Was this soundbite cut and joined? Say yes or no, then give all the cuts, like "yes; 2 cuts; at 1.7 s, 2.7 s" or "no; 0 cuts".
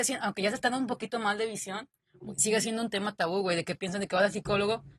no; 0 cuts